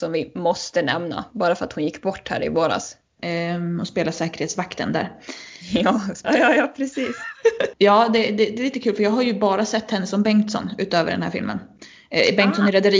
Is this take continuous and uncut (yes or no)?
no